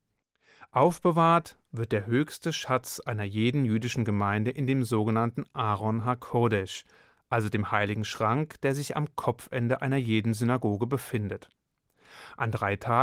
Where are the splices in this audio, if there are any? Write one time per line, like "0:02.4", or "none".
none